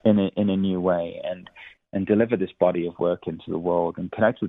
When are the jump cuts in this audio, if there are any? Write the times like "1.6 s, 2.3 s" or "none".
none

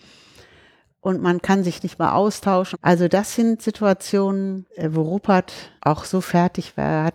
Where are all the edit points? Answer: 2.7 s, 4.7 s, 5.8 s

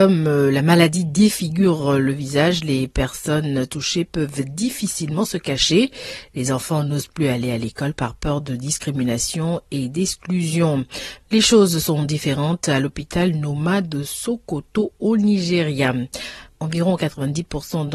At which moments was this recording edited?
11.2 s, 16.5 s

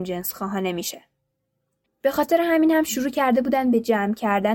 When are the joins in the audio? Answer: 1.8 s

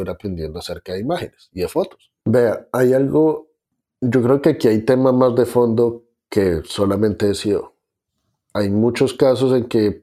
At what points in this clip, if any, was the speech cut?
2.2 s

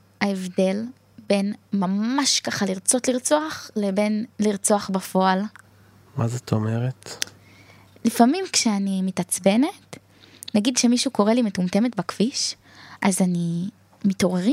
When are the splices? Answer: none

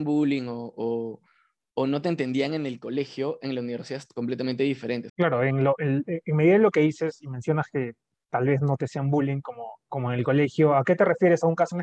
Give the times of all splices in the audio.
5.1 s

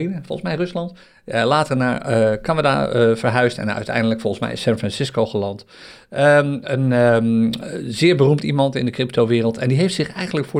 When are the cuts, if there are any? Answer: none

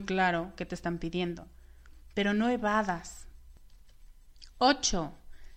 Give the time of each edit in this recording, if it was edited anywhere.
none

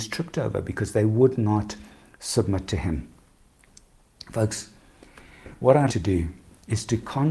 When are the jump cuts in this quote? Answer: 5.9 s

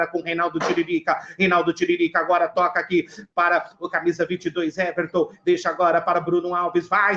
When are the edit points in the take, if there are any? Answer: none

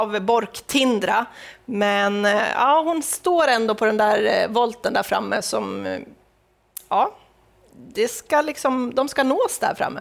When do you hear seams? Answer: none

